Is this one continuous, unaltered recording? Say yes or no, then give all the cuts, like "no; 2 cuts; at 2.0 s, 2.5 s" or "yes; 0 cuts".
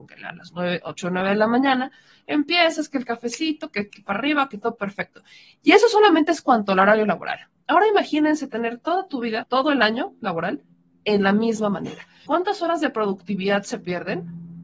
no; 3 cuts; at 3.9 s, 9.4 s, 12.3 s